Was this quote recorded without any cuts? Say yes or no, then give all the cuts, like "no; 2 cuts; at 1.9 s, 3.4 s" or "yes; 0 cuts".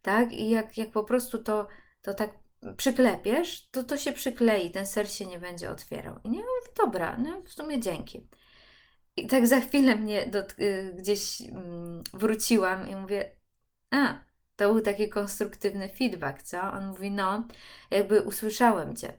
no; 1 cut; at 6.2 s